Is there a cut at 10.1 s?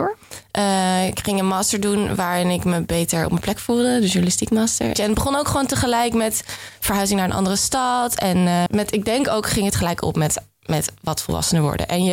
no; 2 cuts; at 5.0 s, 8.7 s

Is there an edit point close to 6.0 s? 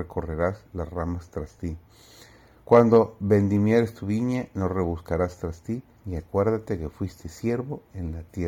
yes; 1 cut; at 6.0 s

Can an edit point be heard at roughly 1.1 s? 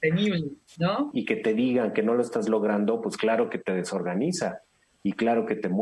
yes; 1 cut; at 1.1 s

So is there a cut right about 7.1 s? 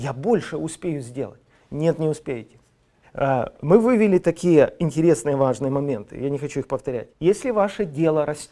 yes; 2 cuts; at 3.0 s, 7.1 s

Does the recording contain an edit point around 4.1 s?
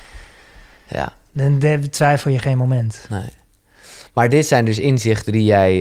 no; 1 cut; at 1.3 s

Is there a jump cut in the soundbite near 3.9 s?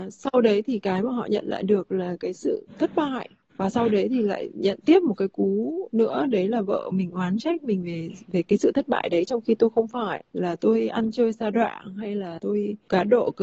no; 0 cuts

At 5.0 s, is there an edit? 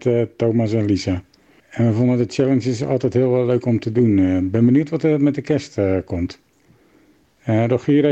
no; 1 cut; at 1.6 s

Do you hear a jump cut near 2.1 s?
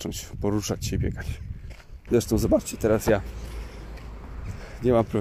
yes; 1 cut; at 2.1 s

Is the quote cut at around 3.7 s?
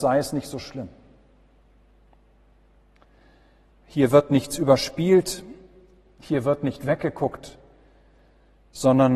yes; 1 cut; at 3.7 s

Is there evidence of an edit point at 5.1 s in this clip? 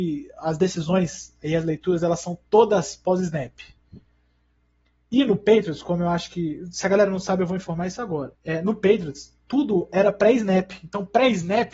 no; 1 cut; at 8.3 s

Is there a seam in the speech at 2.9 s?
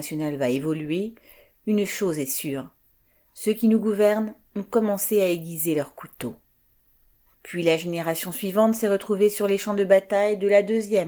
no; 1 cut; at 7.3 s

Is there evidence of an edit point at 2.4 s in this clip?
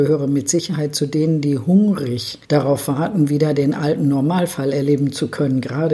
yes; 1 cut; at 2.4 s

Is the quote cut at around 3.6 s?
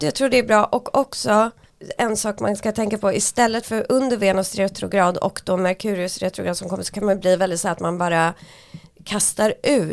yes; 1 cut; at 3.6 s

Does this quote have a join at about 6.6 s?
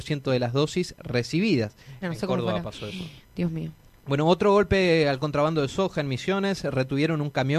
no; 1 cut; at 2.0 s

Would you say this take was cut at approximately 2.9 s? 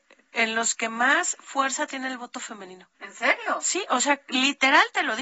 yes; 1 cut; at 2.9 s

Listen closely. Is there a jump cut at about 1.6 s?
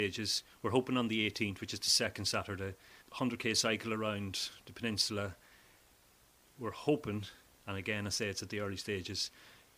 no; 1 cut; at 3.0 s

